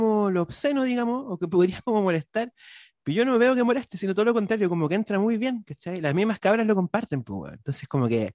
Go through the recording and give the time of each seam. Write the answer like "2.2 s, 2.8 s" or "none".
none

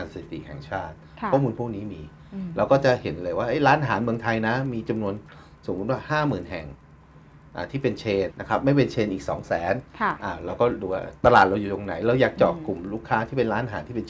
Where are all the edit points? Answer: 8.3 s

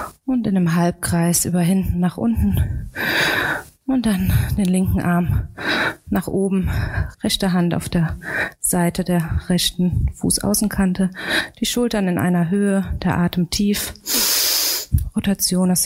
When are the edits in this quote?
7.1 s

